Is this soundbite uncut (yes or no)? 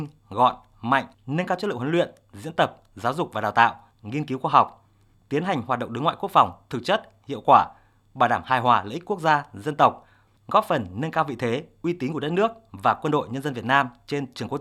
no